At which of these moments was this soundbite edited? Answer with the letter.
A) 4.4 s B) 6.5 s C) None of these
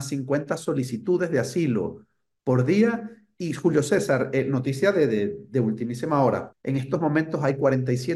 B